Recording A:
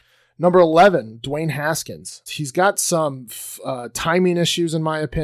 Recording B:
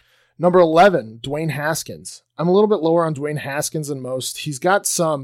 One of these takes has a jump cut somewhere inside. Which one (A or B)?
A